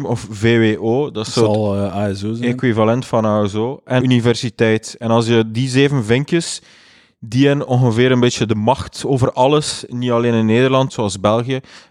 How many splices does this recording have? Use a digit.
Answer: 2